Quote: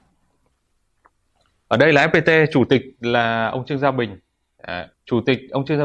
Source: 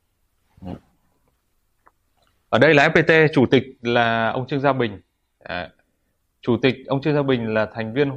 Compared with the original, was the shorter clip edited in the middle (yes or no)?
yes